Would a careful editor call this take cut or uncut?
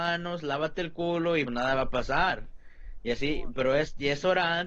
cut